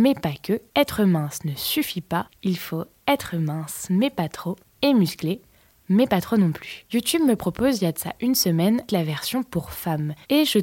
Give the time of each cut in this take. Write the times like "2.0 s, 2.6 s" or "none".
6.9 s, 8.9 s

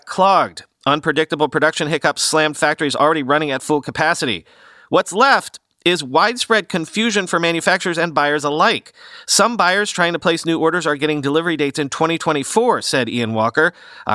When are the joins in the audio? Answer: none

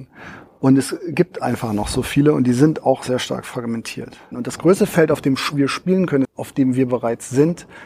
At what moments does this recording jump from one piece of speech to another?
4.3 s, 6.2 s

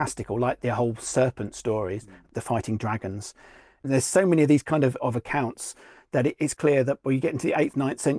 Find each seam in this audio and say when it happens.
3.8 s, 6.6 s

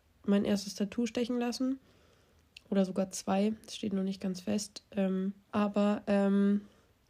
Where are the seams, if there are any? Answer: 5.5 s

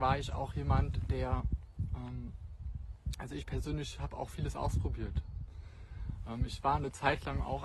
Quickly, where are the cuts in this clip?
none

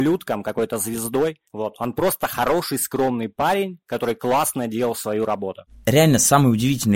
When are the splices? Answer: 1.5 s

